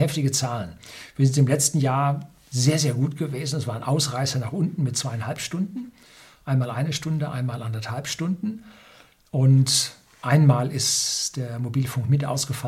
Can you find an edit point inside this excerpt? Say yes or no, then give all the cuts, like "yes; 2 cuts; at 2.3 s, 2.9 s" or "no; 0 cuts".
no; 0 cuts